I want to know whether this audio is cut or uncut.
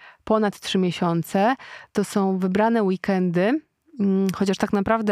uncut